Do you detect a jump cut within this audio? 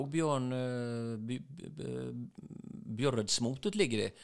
no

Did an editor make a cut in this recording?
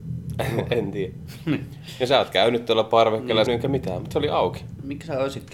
yes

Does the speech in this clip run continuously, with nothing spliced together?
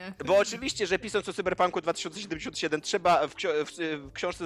yes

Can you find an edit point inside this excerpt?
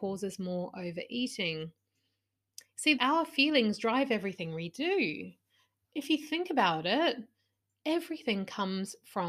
yes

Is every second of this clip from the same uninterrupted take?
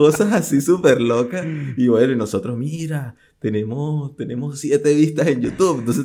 yes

